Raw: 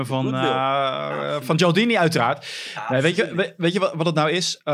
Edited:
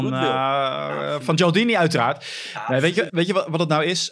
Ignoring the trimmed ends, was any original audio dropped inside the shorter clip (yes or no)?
yes